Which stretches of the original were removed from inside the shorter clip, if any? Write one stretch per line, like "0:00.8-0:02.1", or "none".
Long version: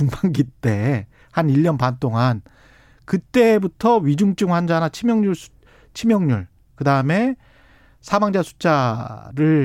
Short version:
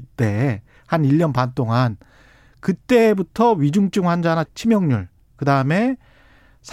0:04.9-0:05.8